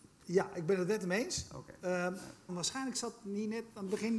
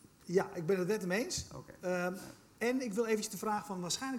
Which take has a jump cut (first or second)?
first